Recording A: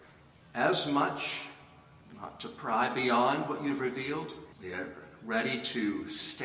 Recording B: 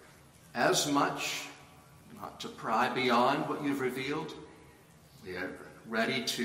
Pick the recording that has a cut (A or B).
A